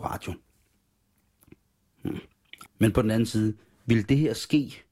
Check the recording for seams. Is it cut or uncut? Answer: cut